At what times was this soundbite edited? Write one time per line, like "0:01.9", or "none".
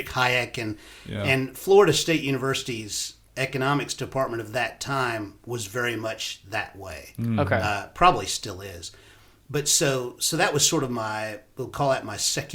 none